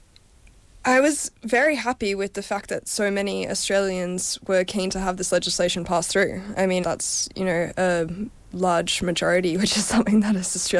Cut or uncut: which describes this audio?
cut